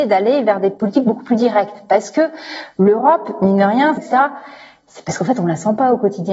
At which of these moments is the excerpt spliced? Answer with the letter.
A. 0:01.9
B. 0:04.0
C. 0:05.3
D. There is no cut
B